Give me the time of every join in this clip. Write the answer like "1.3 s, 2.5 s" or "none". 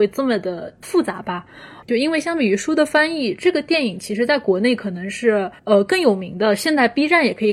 1.8 s, 5.6 s